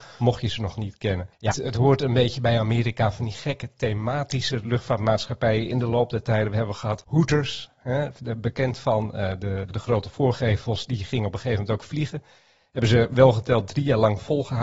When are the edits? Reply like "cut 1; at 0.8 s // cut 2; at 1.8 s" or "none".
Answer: cut 1; at 1.5 s // cut 2; at 9.7 s

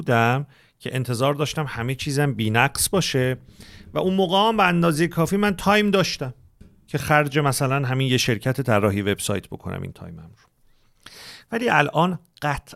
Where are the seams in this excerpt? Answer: none

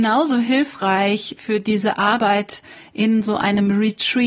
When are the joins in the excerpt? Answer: none

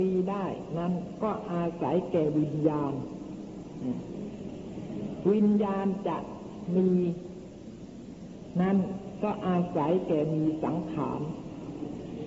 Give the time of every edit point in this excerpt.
none

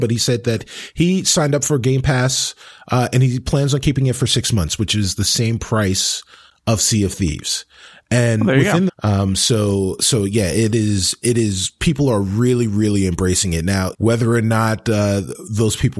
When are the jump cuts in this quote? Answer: cut 1; at 8.9 s // cut 2; at 13.9 s

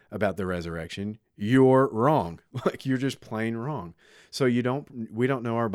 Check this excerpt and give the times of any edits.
none

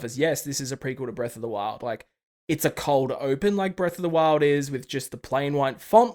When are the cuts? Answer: none

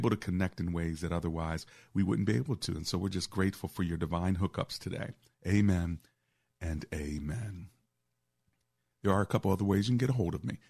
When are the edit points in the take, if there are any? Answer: cut 1; at 5.3 s

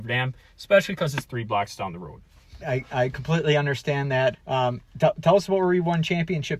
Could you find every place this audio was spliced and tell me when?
cut 1; at 2.6 s // cut 2; at 4.3 s

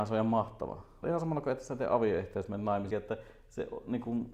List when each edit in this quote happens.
cut 1; at 1.0 s // cut 2; at 2.9 s

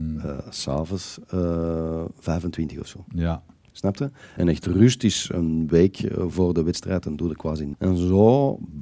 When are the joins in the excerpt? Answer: cut 1; at 4.4 s // cut 2; at 7.7 s

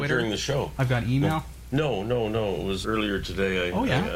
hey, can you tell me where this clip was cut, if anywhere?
cut 1; at 1.7 s // cut 2; at 2.8 s

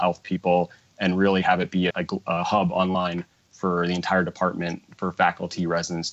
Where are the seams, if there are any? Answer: cut 1; at 1.9 s

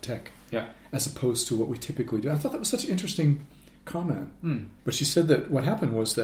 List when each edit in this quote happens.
cut 1; at 4.8 s

